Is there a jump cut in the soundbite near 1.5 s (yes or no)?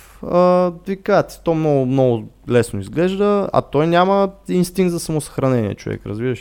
no